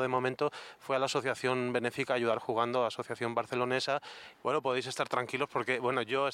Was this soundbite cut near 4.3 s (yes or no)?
yes